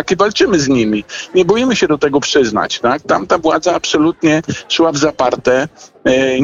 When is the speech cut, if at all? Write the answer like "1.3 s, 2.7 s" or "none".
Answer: none